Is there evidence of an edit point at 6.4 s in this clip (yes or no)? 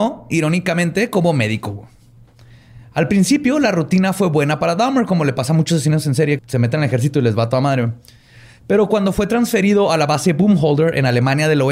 yes